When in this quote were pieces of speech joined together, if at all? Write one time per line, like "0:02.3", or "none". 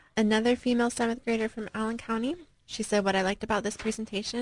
none